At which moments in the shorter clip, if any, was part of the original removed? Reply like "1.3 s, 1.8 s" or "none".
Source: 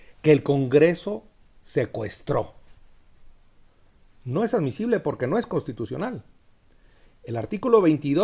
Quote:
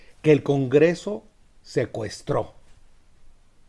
none

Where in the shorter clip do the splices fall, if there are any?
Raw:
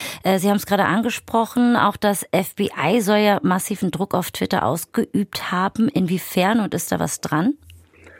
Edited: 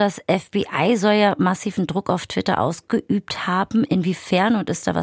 none

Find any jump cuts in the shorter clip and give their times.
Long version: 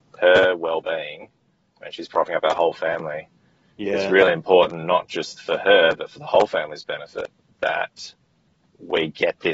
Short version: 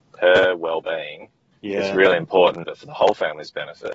1.5 s, 2.6 s

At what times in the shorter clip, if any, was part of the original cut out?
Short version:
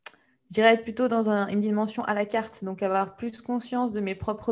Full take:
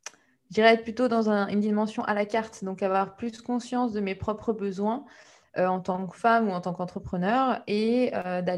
none

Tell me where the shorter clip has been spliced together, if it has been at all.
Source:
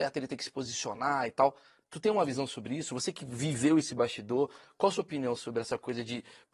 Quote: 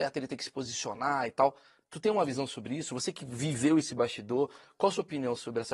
none

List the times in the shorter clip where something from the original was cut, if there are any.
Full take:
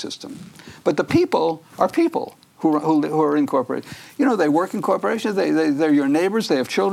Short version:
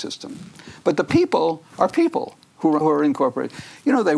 2.8 s

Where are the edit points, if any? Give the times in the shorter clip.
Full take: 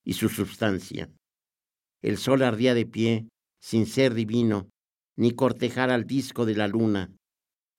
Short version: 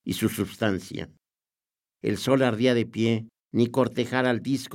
3.4 s

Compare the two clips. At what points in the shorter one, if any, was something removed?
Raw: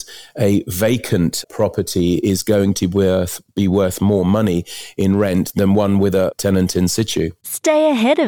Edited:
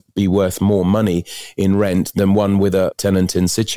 none

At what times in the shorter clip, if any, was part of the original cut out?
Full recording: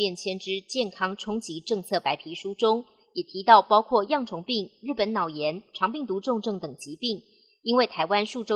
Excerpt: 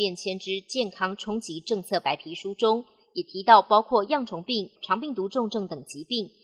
4.8 s

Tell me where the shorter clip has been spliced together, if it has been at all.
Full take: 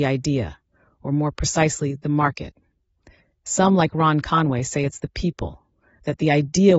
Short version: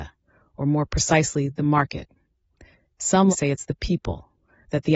3.3 s

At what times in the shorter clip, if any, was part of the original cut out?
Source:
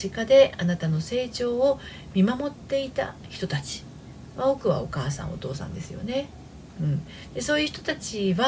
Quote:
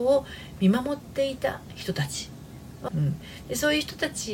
2.9 s

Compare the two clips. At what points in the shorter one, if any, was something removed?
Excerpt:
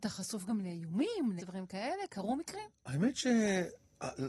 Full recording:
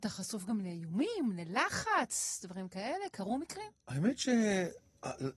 1.4 s

